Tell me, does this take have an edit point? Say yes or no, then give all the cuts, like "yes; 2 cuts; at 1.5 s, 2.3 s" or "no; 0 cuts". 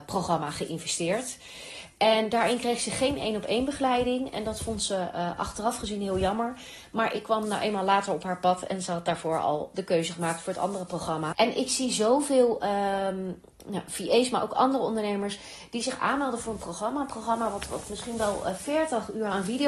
yes; 1 cut; at 11.3 s